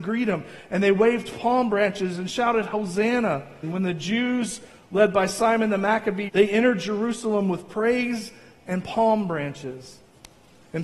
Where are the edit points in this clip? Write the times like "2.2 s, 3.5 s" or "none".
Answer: 3.6 s, 6.3 s